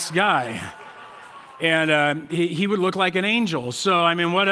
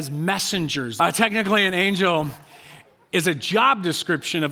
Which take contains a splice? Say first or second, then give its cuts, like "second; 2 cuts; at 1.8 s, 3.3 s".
second; 1 cut; at 1.0 s